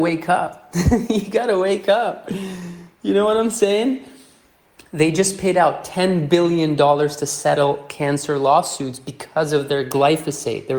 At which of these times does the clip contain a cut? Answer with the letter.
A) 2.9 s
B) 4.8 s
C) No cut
B